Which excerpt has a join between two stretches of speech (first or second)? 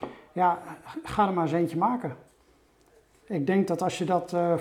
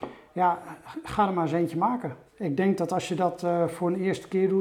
second